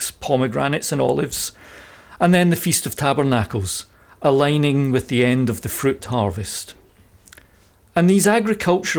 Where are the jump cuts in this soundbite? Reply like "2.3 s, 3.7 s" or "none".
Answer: none